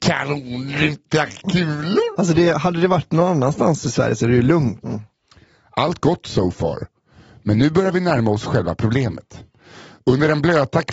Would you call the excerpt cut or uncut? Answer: cut